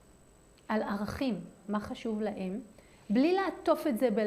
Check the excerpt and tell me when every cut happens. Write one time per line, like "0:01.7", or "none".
0:01.6